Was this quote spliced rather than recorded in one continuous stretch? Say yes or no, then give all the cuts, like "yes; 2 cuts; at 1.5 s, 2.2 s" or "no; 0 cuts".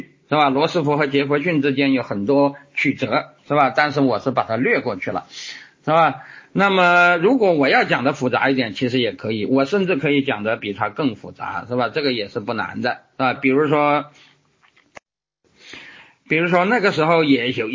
yes; 1 cut; at 13.4 s